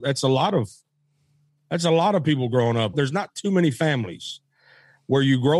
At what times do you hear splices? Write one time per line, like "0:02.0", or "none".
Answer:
0:02.9